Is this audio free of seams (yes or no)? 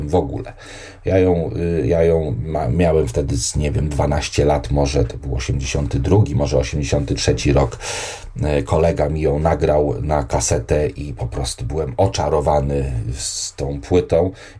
yes